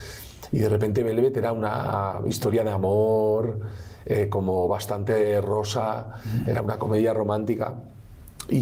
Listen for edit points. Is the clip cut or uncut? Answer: uncut